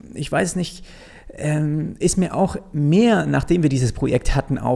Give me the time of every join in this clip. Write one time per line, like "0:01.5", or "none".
none

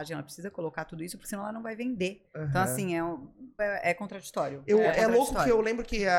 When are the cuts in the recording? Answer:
0:03.6

